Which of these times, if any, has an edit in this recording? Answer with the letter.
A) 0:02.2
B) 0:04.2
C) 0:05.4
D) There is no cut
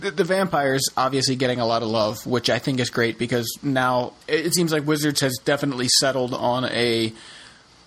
B